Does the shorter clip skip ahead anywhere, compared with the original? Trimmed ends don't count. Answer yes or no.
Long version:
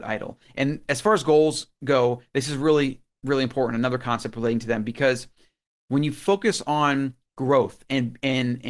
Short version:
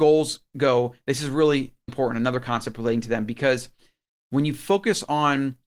yes